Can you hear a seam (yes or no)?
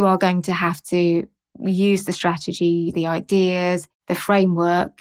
yes